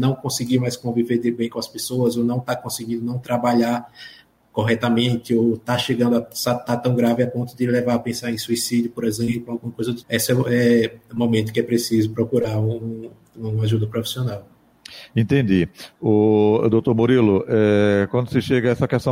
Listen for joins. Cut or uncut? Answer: cut